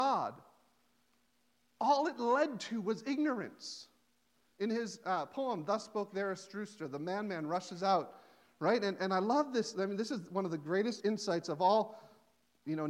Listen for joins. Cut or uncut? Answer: uncut